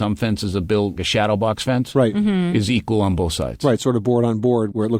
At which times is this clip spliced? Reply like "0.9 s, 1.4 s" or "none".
1.0 s